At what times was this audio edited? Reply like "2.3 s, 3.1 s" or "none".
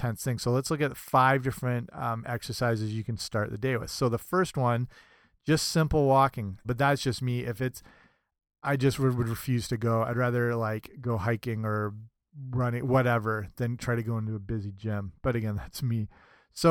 6.6 s